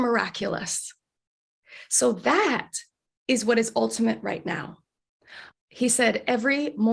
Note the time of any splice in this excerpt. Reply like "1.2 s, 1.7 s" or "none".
5.5 s